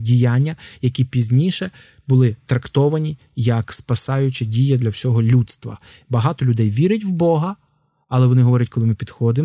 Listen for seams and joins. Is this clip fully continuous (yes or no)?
yes